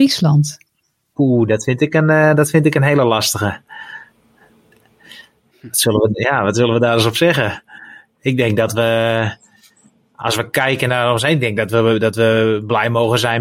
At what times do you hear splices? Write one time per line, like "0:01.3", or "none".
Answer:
0:01.1